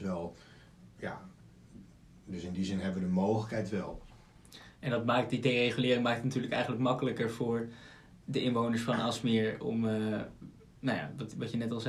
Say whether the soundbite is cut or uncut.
cut